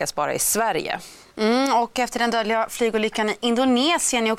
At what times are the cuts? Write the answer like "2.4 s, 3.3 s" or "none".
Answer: none